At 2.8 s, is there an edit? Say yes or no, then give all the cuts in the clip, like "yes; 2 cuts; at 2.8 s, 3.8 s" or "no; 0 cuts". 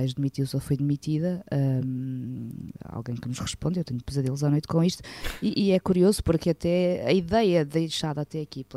no; 0 cuts